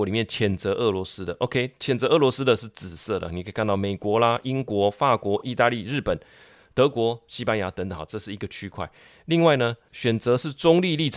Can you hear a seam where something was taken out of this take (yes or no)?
no